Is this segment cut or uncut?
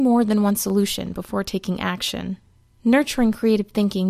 uncut